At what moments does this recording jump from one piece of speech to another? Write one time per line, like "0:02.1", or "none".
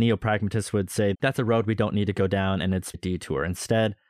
0:01.1
0:02.9